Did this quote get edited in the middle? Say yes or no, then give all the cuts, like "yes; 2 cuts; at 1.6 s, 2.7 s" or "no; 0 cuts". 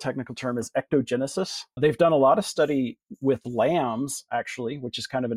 yes; 1 cut; at 1.8 s